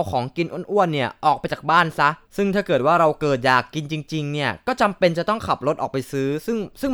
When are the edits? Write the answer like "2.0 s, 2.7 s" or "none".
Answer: 2.2 s

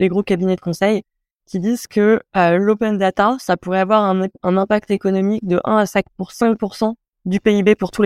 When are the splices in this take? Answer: none

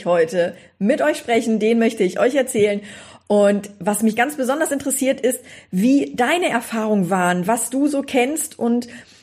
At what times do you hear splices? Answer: none

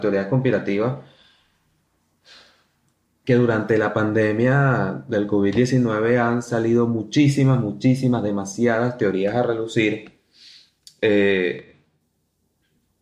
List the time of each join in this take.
none

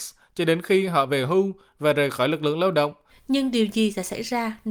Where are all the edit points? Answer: 3.1 s

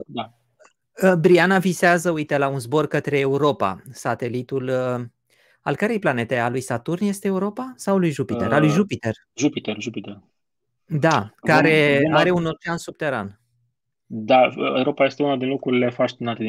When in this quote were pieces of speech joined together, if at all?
none

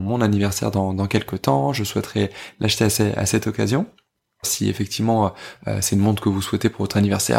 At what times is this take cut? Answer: 4.4 s

